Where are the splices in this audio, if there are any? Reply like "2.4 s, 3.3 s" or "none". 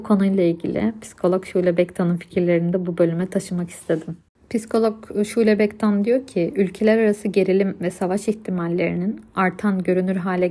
none